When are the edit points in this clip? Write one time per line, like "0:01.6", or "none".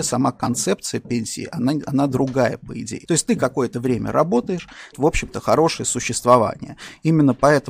0:03.0
0:04.9